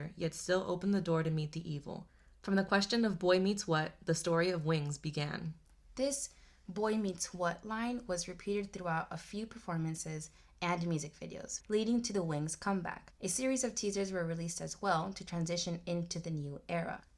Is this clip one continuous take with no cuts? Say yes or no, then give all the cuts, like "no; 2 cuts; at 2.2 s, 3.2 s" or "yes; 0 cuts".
no; 1 cut; at 11.6 s